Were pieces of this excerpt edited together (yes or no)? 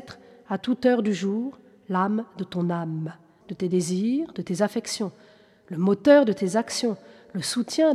yes